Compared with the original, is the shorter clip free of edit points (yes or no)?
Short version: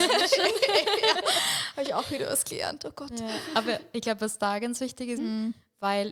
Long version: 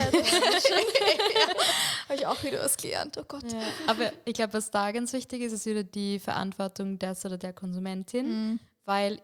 no